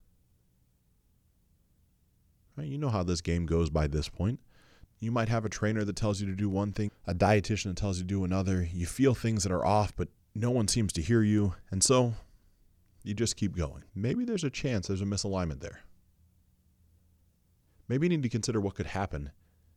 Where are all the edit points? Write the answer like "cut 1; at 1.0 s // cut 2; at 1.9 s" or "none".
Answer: cut 1; at 4.8 s // cut 2; at 6.9 s // cut 3; at 13.9 s